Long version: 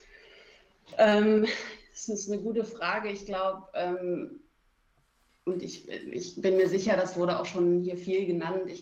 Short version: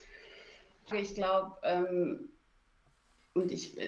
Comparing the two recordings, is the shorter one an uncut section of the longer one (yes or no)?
no